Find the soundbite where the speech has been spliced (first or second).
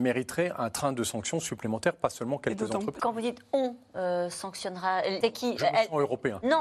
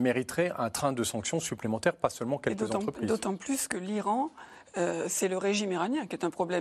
first